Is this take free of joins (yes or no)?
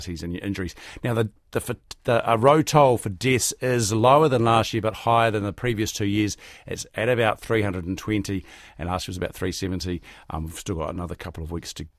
yes